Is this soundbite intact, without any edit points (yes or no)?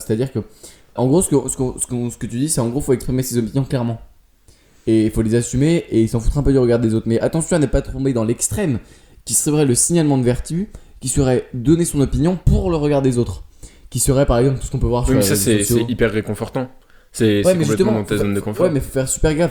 no